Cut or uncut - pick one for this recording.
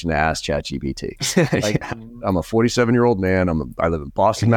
cut